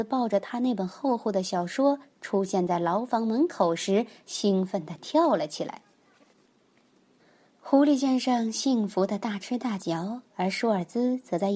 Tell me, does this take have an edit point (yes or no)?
no